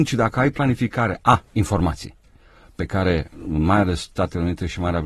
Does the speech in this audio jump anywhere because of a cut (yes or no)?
yes